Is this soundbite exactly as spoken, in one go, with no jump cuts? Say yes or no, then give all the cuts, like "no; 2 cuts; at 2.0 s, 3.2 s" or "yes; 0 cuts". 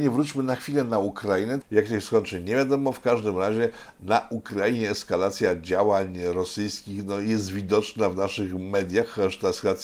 no; 1 cut; at 1.6 s